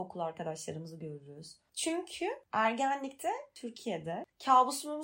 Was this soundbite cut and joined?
no; 0 cuts

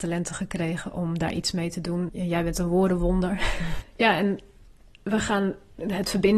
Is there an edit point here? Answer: yes; 2 cuts; at 2.1 s, 3.8 s

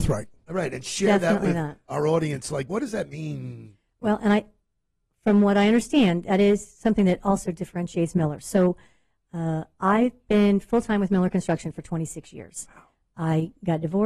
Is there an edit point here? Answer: no; 0 cuts

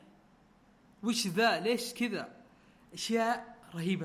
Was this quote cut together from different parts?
no; 0 cuts

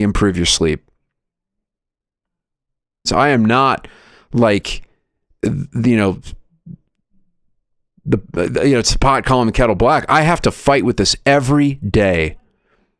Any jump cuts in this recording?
yes; 1 cut; at 3.1 s

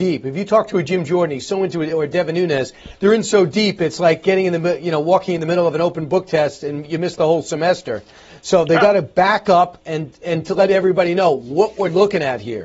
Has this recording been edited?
no; 0 cuts

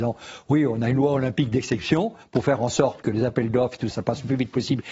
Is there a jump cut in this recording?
yes; 1 cut; at 3.9 s

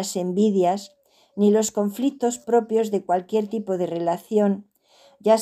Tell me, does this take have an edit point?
no; 0 cuts

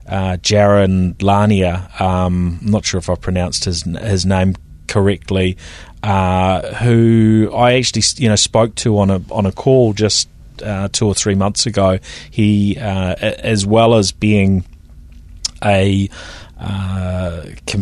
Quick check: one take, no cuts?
yes; 0 cuts

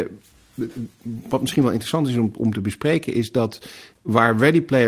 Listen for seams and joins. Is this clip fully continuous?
yes; 0 cuts

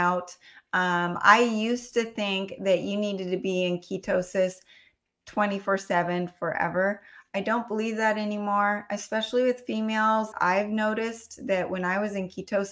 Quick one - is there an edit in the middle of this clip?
yes; 1 cut; at 10.3 s

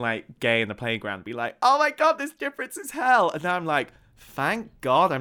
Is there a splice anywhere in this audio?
no; 0 cuts

